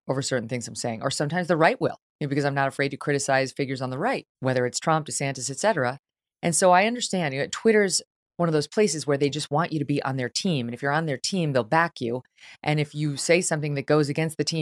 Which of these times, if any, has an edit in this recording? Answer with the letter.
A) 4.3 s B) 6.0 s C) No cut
A